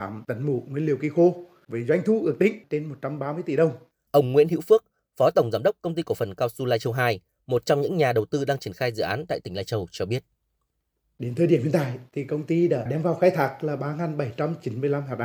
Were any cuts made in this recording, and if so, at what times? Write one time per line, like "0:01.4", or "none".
0:03.9

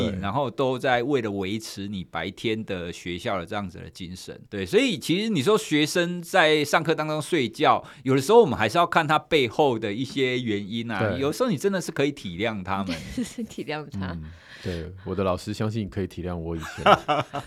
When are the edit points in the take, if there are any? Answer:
0:04.5

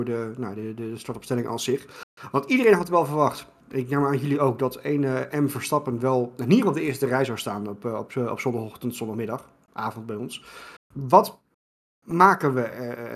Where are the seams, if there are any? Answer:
0:03.6
0:10.8

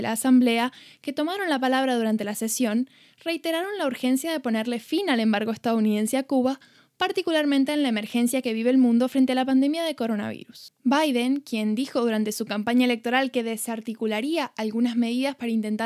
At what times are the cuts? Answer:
none

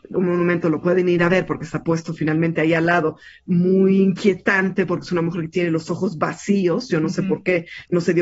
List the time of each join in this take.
none

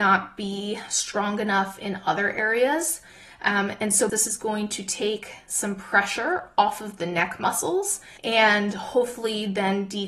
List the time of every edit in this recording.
0:04.1
0:08.2

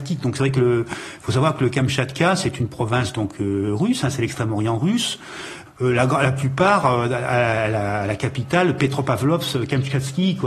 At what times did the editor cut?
0:05.7

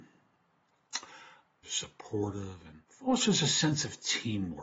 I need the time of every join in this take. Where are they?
0:01.6
0:02.8

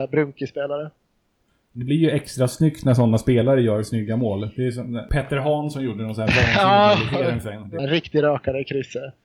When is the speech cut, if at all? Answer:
0:07.8

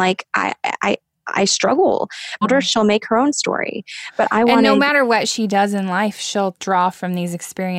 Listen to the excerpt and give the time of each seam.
0:02.4

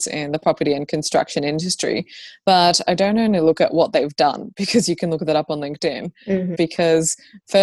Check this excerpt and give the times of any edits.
0:06.5

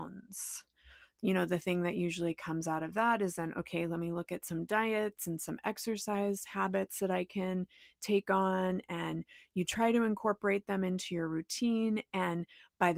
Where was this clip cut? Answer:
none

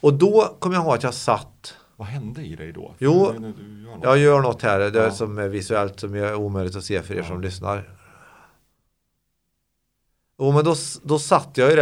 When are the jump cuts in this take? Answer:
none

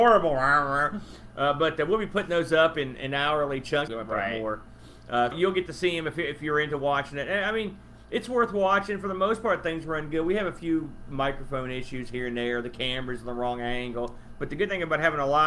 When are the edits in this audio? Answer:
0:03.9
0:05.3

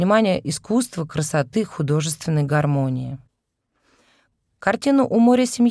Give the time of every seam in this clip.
none

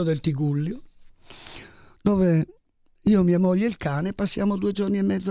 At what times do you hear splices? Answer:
none

